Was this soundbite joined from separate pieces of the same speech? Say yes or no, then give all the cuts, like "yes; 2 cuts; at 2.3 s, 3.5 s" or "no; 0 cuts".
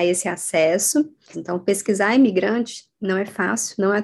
yes; 1 cut; at 1.3 s